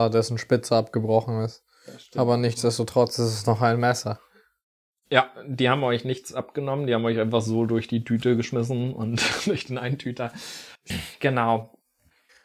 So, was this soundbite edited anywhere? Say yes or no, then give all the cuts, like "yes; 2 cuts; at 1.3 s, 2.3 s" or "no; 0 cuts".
yes; 1 cut; at 10.9 s